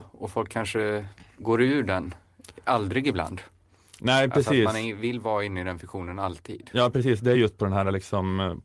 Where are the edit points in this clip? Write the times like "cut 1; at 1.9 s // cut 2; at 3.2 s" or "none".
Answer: none